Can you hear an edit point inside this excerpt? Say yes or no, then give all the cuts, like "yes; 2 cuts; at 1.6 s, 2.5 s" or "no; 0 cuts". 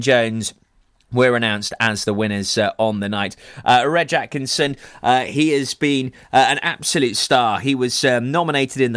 no; 0 cuts